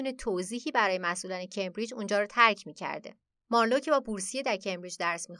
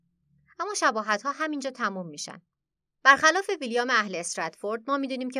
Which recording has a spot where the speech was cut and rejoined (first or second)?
first